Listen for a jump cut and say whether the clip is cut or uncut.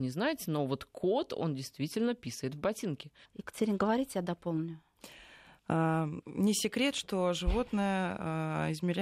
cut